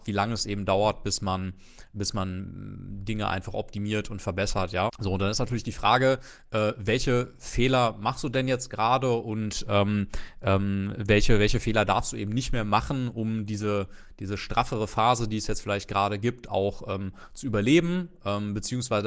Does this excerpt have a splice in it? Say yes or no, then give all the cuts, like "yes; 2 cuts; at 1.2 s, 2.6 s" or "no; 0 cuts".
yes; 1 cut; at 4.9 s